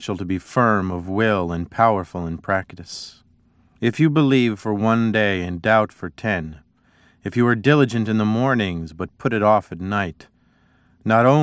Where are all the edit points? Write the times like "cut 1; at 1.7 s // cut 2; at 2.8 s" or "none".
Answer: cut 1; at 3.7 s

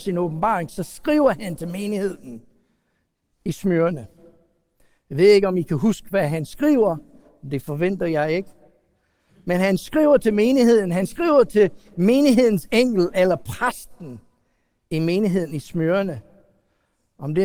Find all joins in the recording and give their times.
none

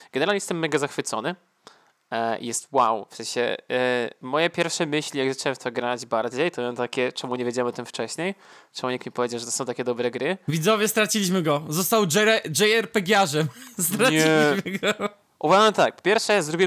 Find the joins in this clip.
none

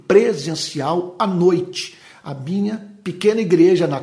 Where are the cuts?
none

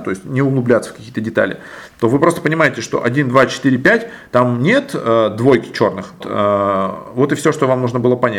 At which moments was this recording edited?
cut 1; at 6.2 s

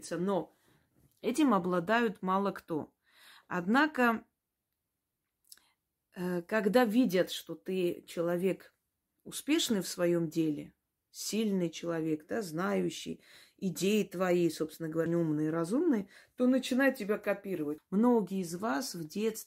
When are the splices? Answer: cut 1; at 15.1 s // cut 2; at 17.8 s

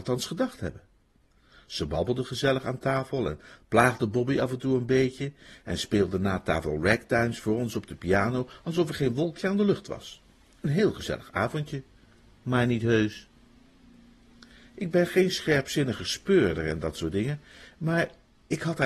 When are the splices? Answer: none

